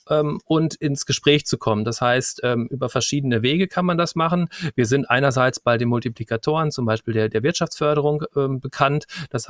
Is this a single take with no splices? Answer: yes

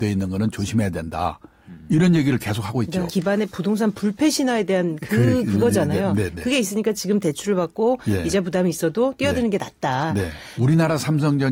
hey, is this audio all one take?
no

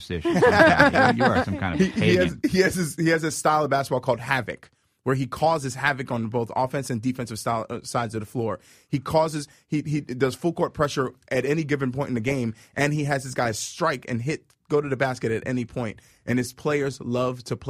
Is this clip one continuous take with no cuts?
yes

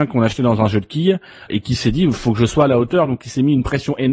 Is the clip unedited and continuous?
no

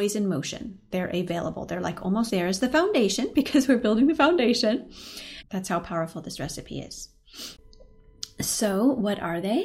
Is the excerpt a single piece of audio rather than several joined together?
no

